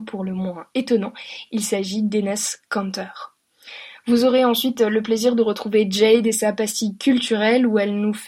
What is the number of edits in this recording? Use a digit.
0